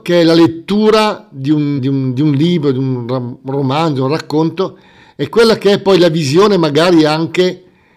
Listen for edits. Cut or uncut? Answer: cut